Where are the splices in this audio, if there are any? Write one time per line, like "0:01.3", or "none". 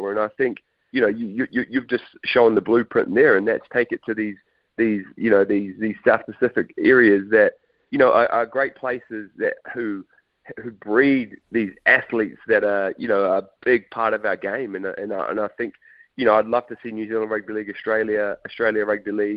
0:18.4